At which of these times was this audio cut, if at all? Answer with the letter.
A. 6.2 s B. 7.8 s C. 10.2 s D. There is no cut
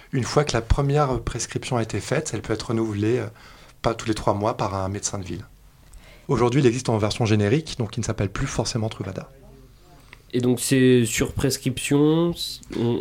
A